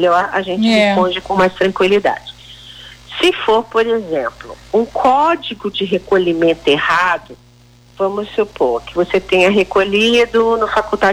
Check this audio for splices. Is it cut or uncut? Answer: cut